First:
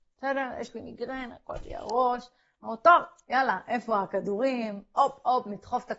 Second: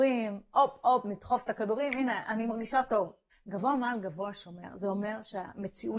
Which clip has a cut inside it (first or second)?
second